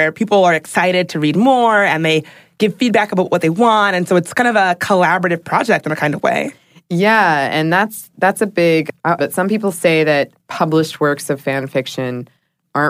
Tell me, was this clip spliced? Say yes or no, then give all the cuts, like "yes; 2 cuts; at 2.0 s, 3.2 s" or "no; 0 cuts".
yes; 1 cut; at 9.2 s